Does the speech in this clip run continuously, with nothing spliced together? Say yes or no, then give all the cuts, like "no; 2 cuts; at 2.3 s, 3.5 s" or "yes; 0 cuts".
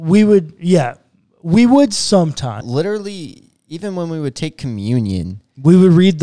no; 1 cut; at 2.6 s